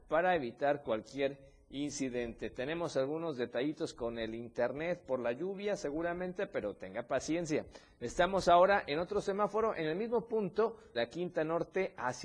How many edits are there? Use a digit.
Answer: 1